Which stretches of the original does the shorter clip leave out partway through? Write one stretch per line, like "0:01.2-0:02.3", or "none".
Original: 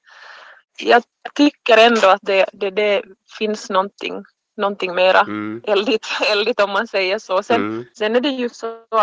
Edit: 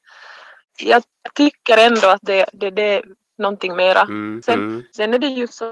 0:03.2-0:04.4
0:05.6-0:07.4